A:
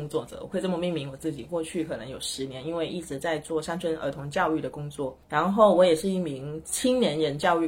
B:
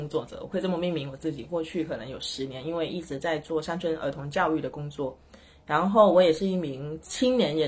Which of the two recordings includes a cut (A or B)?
A